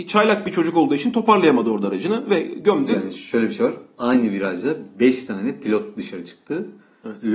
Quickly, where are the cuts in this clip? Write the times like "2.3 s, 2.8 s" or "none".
none